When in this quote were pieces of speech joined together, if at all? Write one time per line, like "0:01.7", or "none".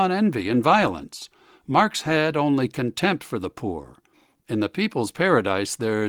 none